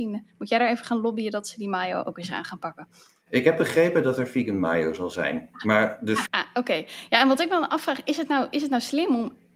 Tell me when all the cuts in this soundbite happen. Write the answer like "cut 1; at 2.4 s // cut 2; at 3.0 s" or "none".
cut 1; at 6.3 s